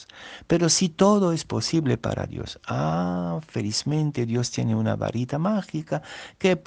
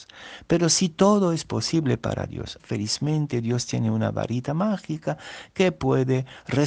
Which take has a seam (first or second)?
second